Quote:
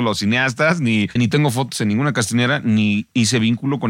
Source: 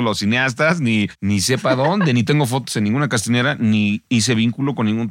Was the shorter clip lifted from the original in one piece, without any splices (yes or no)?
no